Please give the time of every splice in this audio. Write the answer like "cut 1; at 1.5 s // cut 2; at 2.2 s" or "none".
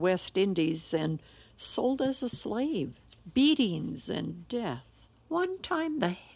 none